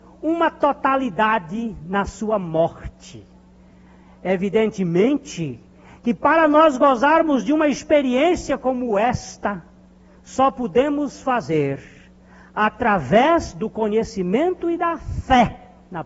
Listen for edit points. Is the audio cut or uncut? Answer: uncut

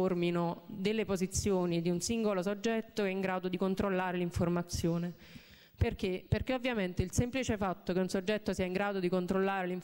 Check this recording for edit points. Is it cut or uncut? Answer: uncut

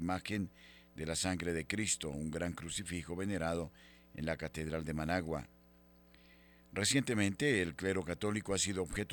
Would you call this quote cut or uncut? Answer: uncut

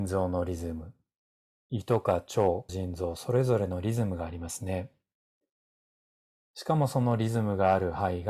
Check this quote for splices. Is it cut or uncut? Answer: cut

